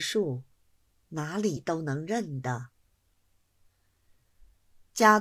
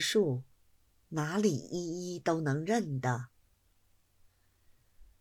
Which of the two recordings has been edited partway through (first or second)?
first